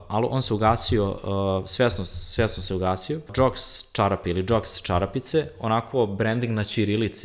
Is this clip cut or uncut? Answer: uncut